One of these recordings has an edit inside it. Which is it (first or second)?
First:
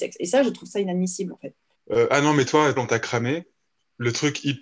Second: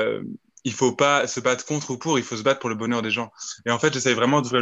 first